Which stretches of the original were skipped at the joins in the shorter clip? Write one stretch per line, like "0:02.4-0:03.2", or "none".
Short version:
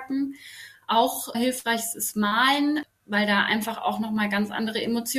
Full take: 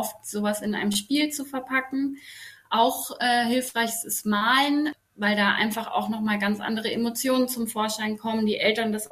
0:03.2-0:03.4